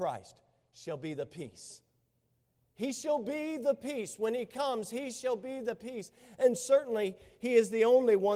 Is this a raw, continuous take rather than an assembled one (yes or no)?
yes